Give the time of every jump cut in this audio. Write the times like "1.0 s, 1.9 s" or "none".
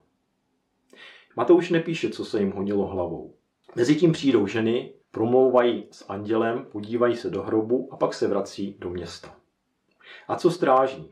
1.3 s, 3.6 s, 5.0 s